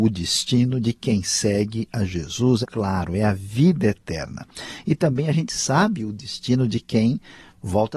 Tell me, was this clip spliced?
yes; 1 cut; at 2.6 s

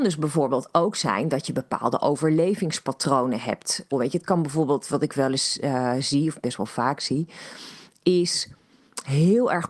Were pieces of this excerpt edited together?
yes; 1 cut; at 3.9 s

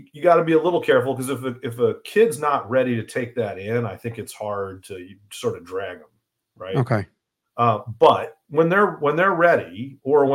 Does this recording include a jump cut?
no; 0 cuts

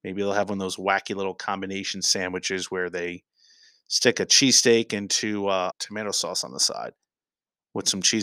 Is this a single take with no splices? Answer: no; 1 cut; at 5.7 s

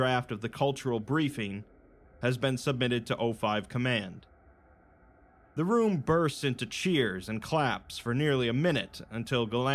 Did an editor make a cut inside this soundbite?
yes; 1 cut; at 2.0 s

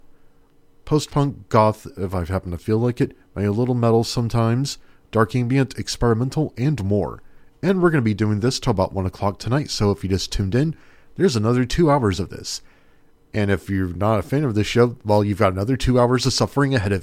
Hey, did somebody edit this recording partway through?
no; 0 cuts

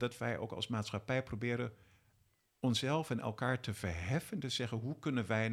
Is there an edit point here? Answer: no; 0 cuts

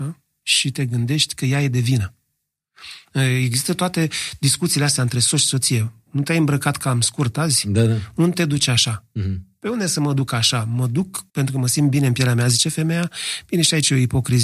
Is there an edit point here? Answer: yes; 1 cut; at 11.3 s

